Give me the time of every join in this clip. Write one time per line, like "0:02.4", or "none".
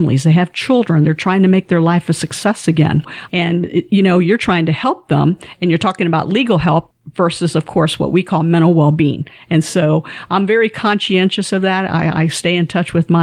none